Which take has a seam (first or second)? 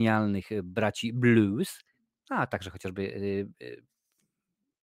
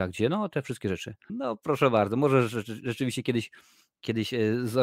second